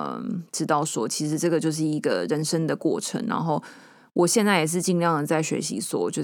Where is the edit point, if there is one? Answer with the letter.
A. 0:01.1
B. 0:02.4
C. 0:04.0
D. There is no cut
D